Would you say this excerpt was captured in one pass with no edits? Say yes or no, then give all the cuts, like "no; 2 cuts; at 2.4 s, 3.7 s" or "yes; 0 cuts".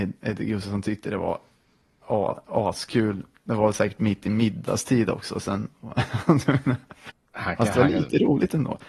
yes; 0 cuts